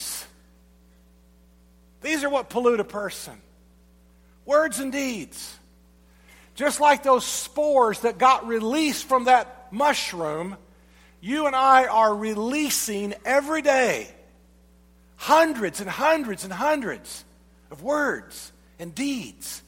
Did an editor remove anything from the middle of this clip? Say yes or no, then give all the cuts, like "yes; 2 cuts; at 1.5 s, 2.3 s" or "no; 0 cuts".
no; 0 cuts